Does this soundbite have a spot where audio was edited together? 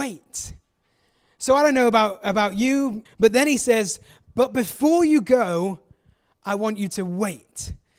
yes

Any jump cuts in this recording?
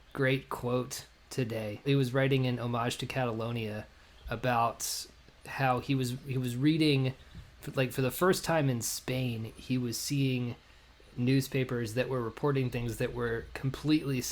yes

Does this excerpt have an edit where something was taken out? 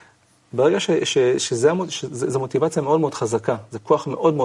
no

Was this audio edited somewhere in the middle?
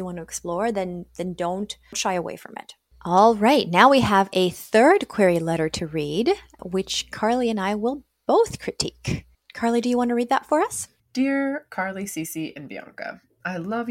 no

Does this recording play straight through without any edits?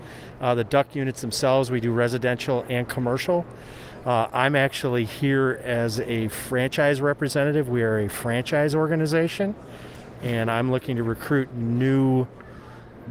yes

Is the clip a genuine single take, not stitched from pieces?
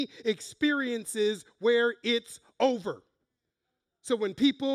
yes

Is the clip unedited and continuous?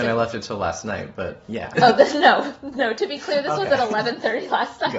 no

